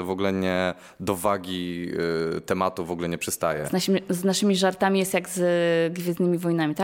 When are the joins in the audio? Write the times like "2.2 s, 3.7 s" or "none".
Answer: none